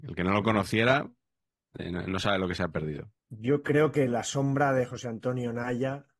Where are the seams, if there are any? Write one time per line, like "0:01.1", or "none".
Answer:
0:03.2